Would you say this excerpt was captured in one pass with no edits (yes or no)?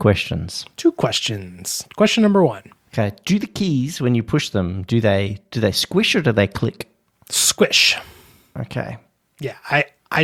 yes